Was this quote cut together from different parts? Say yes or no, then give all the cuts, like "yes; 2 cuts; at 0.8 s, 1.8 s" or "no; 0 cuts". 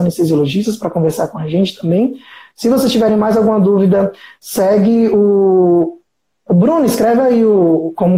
no; 0 cuts